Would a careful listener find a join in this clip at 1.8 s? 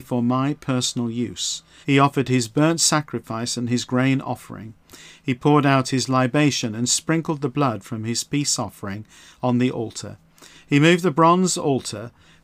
yes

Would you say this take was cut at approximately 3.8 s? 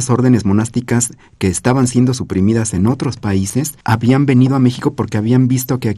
yes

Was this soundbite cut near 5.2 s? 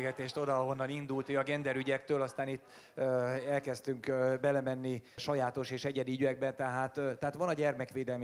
yes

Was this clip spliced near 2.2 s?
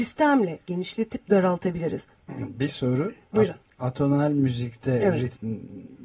yes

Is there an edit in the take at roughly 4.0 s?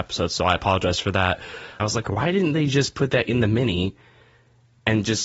no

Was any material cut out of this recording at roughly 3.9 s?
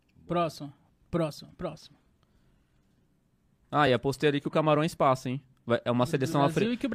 no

